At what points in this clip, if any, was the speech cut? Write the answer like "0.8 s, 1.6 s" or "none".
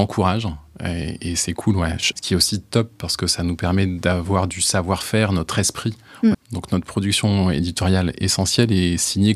2.1 s, 6.3 s